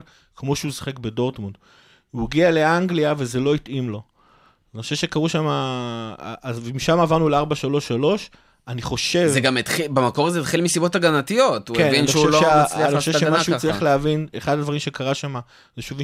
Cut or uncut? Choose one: uncut